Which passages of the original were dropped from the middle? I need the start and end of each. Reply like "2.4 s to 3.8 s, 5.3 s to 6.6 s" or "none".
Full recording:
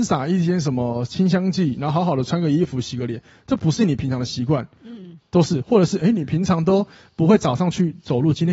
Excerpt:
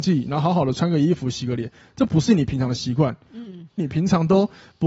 5.3 s to 6.1 s